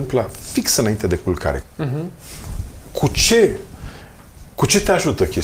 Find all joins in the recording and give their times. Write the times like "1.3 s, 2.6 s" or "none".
1.6 s